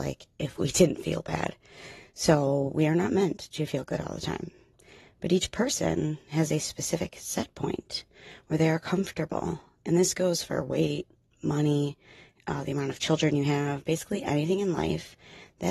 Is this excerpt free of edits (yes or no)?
yes